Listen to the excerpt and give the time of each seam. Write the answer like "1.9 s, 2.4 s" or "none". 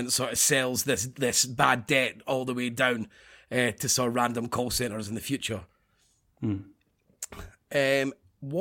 none